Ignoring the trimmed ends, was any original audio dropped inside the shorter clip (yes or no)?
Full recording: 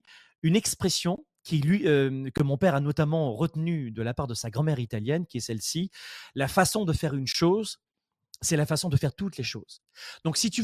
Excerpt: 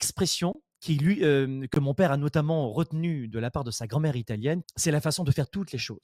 yes